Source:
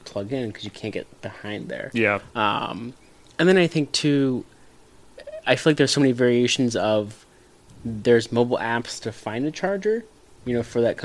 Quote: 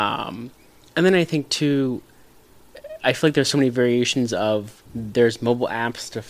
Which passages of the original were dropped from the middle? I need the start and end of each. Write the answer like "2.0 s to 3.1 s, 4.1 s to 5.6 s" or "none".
7.3 s to 7.8 s

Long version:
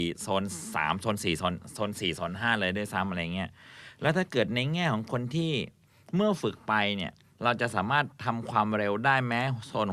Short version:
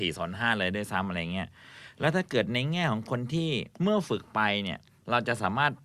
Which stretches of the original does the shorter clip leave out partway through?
5.8 s to 6.1 s

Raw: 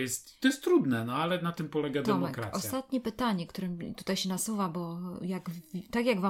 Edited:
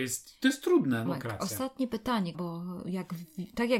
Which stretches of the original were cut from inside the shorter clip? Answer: 1.1 s to 2.2 s, 3.5 s to 4.7 s

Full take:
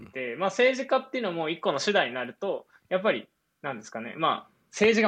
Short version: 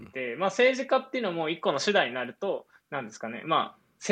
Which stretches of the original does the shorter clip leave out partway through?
2.8 s to 3.5 s

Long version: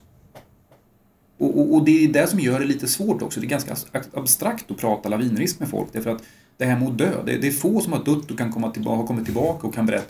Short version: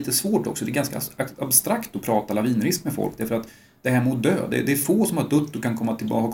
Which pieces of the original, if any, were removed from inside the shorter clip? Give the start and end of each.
none

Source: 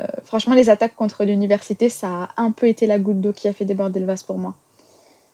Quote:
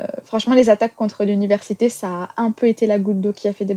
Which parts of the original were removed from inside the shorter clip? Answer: none

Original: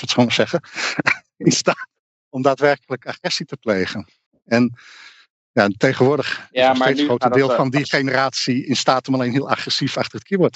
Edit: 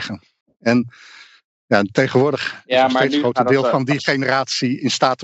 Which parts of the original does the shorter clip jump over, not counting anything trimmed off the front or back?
none

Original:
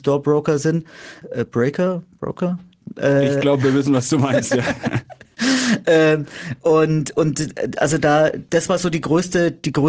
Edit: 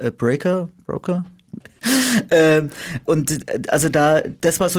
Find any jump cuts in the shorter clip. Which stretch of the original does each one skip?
2.9 s to 5.2 s, 6.6 s to 7.1 s

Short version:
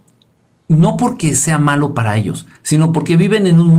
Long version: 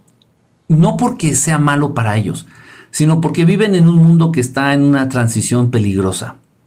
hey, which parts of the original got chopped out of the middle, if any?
2.6 s to 2.8 s

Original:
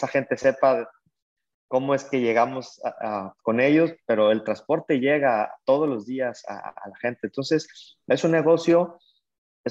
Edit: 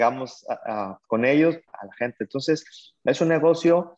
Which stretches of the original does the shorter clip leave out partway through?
4.0 s to 6.7 s

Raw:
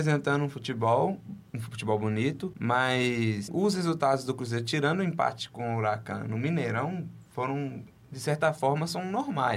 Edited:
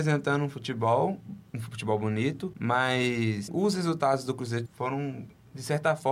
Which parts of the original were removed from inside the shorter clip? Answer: 4.7 s to 7.2 s

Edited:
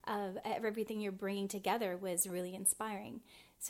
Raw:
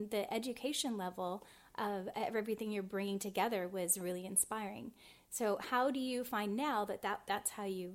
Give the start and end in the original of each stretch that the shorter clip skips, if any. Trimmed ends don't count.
none

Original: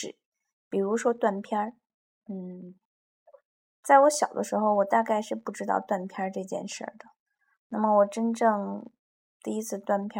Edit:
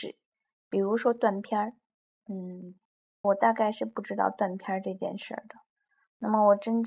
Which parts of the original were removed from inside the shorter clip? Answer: 3.2 s to 4.7 s

